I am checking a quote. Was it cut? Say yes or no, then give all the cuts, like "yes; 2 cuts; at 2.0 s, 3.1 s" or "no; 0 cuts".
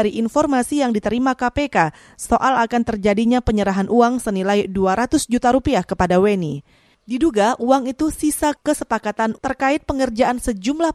no; 0 cuts